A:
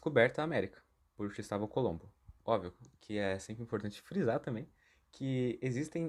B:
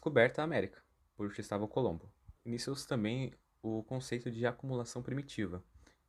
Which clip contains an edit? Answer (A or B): B